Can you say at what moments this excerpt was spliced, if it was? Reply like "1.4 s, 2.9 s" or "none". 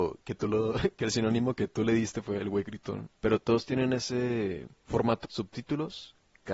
2.4 s, 5.2 s